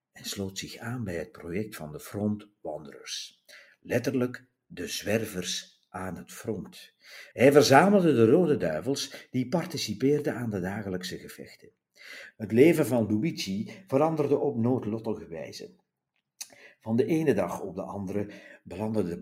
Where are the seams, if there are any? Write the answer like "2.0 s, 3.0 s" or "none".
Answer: 7.3 s, 12.3 s

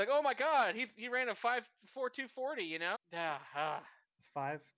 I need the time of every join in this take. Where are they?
2.9 s

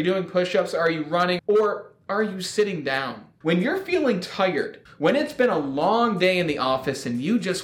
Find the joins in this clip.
1.4 s, 3.4 s, 4.9 s

